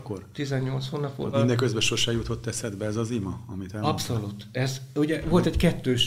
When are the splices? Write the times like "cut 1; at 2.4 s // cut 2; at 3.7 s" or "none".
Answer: cut 1; at 1.3 s